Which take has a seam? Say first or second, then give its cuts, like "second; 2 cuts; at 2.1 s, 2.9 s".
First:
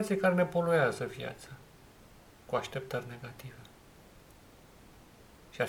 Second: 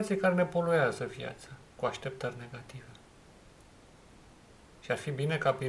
second; 1 cut; at 1.7 s